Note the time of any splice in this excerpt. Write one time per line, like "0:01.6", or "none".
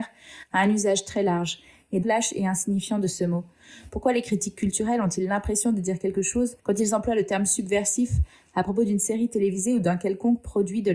0:02.0
0:06.6